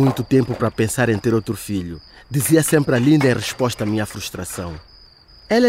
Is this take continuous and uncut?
yes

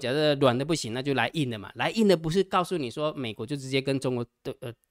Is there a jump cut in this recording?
no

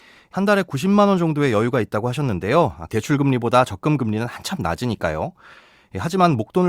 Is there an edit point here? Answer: yes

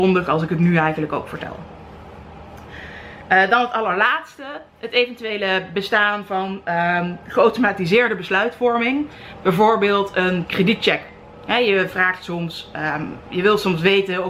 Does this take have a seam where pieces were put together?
no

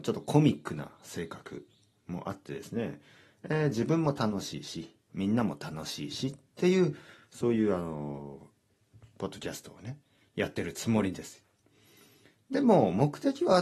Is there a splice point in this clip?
no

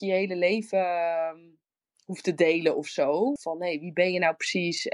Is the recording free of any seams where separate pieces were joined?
no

